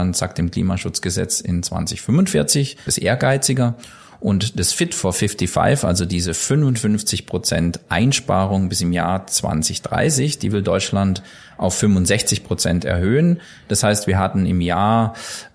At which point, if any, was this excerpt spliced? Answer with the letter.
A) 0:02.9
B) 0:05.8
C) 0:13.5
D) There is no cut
A